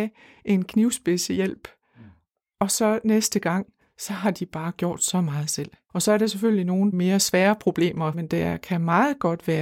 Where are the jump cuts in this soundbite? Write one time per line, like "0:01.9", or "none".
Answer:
0:05.9
0:06.9
0:08.1